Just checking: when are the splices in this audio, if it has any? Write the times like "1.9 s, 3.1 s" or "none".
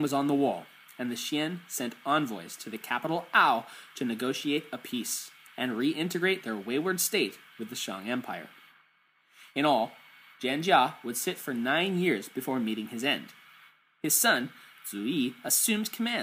5.5 s

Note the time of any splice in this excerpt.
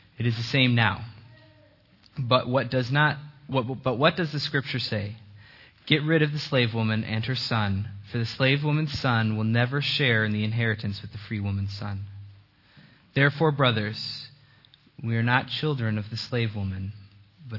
none

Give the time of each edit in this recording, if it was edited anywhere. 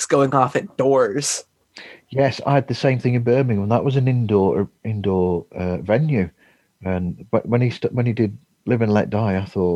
none

